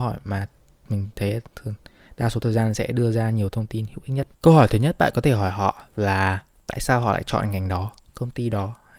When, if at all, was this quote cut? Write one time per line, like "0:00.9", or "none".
0:04.3